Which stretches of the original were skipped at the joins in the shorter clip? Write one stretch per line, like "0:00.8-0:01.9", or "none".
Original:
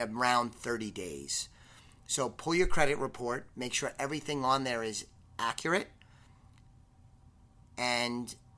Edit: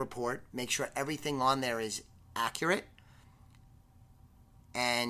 none